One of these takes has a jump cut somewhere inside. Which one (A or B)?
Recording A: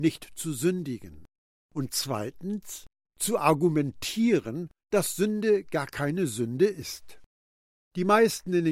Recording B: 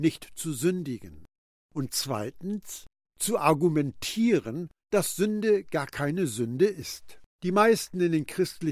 B